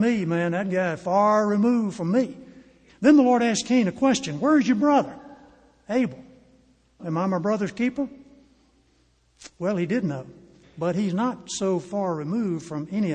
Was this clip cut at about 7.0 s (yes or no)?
yes